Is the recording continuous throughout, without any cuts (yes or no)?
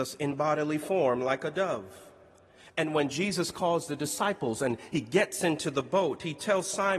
yes